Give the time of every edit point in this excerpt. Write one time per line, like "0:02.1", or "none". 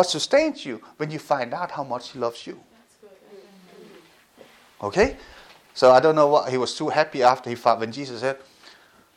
none